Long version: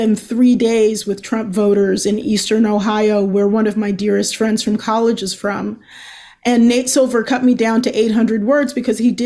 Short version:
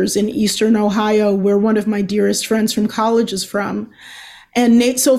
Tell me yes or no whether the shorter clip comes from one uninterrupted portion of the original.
yes